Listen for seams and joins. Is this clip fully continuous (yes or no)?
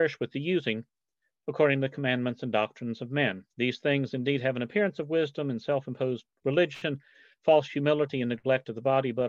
yes